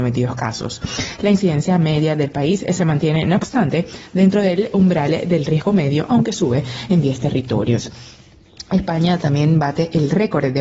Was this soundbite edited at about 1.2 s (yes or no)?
yes